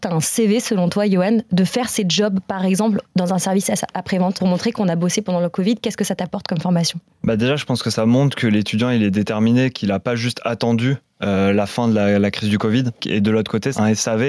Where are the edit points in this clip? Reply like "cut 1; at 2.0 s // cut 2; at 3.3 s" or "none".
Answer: cut 1; at 13.0 s